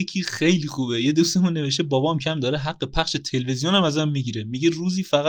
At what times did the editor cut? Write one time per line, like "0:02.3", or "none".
0:02.2